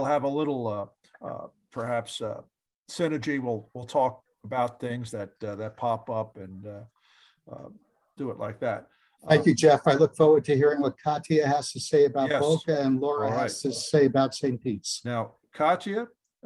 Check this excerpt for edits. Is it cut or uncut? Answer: uncut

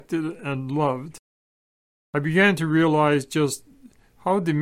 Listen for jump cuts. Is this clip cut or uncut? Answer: uncut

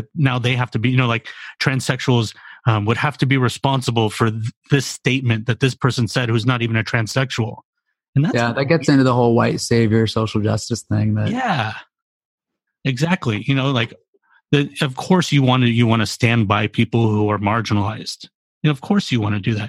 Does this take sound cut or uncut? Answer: uncut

